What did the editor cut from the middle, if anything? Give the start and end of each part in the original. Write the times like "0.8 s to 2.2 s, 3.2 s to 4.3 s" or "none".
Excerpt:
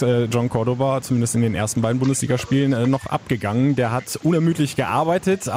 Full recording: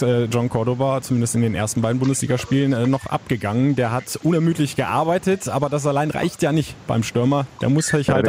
none